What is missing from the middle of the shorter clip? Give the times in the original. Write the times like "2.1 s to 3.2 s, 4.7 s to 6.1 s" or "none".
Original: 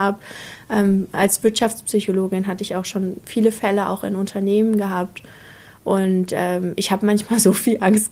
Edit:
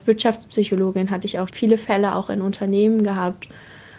2.8 s to 3.2 s